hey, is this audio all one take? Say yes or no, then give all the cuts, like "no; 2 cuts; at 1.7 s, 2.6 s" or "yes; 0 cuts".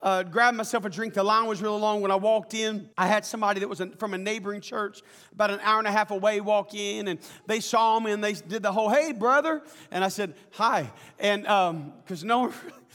no; 1 cut; at 2.9 s